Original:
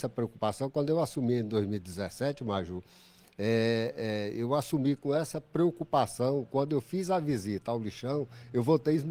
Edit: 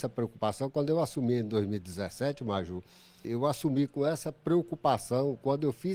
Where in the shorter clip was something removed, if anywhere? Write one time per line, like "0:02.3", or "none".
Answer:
0:03.2